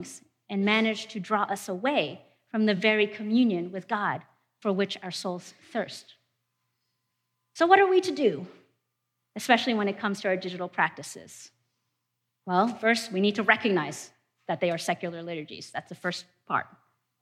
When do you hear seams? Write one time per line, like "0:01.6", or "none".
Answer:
none